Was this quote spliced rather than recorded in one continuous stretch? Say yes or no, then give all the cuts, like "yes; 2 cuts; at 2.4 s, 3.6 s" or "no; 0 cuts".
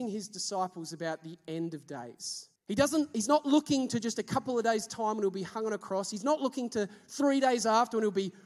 yes; 1 cut; at 2.6 s